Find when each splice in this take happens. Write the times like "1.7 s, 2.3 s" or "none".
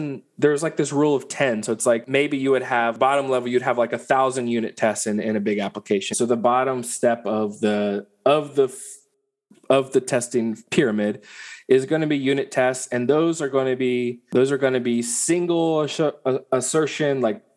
6.1 s